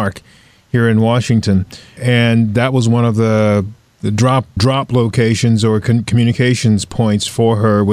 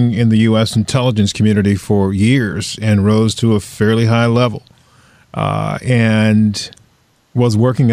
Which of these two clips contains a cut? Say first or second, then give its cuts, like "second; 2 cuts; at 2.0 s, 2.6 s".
first; 2 cuts; at 2.0 s, 4.6 s